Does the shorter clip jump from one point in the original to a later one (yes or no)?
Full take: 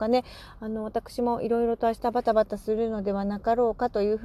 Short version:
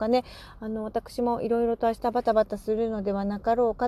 no